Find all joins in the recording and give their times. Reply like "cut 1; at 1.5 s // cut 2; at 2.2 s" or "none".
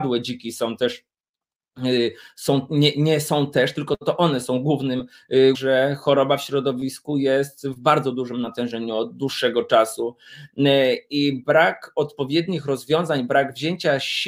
cut 1; at 5.5 s